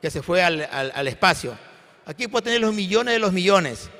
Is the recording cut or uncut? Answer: uncut